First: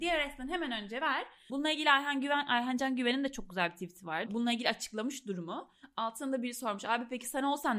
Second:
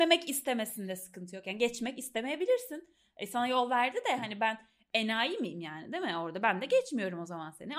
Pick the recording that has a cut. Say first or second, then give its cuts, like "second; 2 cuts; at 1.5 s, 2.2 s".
first; 2 cuts; at 1.5 s, 4.3 s